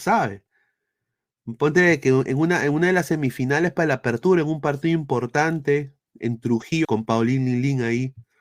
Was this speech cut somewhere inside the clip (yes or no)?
yes